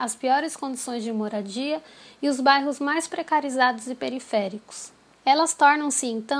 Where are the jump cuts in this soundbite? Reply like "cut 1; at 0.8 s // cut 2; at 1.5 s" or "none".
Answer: cut 1; at 5.2 s